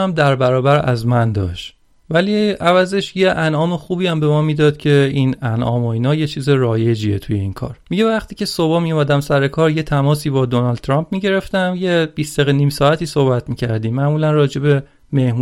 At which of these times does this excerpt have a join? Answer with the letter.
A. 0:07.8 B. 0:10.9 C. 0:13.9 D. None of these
A